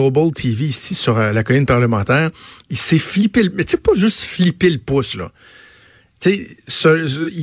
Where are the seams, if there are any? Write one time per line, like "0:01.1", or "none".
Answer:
none